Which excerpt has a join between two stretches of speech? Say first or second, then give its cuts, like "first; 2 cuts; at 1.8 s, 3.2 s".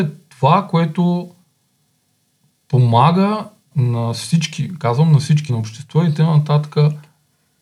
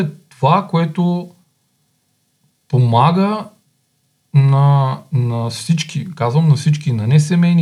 first; 2 cuts; at 3.7 s, 5.5 s